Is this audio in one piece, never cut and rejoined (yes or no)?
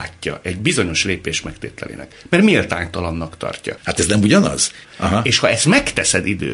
no